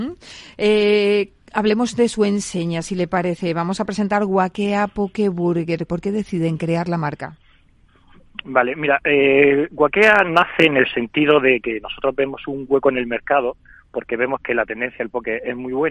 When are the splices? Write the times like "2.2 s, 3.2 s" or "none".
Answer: 5.9 s